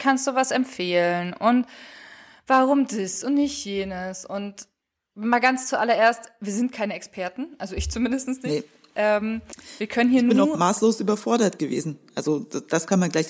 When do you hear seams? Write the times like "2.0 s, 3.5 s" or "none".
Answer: none